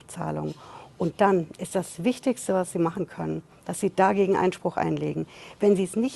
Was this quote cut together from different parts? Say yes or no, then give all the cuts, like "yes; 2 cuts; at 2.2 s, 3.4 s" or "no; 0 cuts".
no; 0 cuts